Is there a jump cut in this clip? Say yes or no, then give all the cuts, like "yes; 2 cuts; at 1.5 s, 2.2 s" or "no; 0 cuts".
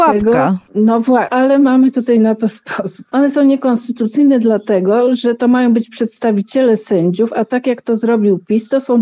yes; 1 cut; at 1.3 s